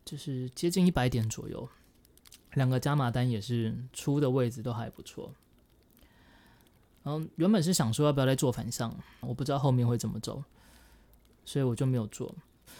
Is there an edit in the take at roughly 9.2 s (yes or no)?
yes